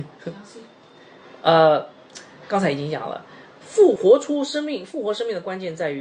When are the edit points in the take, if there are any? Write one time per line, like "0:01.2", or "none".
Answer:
0:04.0